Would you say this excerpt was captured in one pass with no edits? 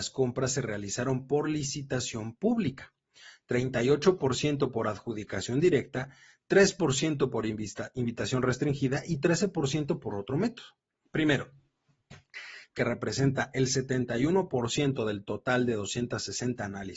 no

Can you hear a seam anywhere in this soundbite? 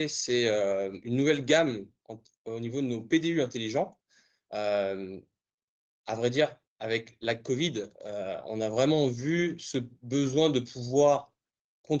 no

